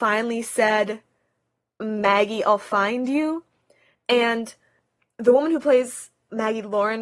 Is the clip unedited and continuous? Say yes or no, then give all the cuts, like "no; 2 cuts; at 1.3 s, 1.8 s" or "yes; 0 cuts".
yes; 0 cuts